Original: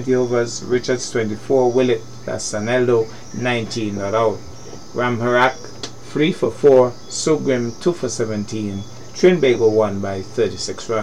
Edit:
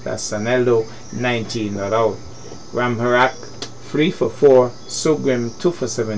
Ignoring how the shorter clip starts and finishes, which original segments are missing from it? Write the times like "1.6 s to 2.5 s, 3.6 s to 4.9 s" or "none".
none